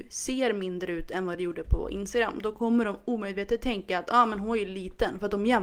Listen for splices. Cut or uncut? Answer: uncut